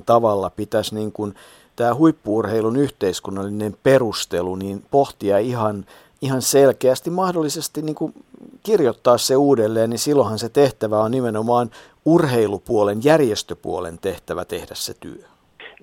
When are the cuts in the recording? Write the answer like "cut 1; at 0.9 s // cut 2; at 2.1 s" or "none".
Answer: none